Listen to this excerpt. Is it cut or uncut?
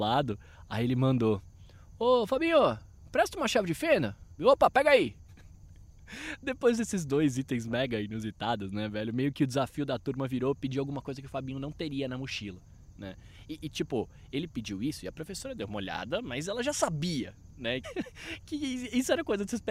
cut